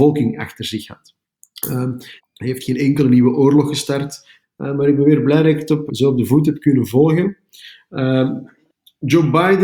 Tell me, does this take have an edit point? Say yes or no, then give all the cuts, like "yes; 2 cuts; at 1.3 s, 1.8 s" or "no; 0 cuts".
yes; 3 cuts; at 2.2 s, 4.4 s, 5.9 s